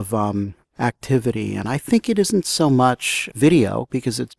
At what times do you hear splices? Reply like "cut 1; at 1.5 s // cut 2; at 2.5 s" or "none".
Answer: none